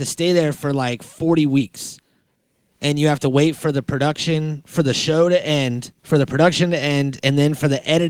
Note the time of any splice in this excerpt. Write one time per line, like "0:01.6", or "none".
0:06.0